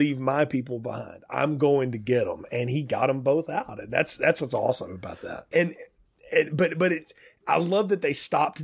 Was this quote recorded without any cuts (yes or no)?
no